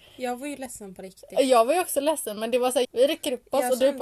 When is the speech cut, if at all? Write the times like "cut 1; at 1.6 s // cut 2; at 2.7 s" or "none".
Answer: cut 1; at 2.8 s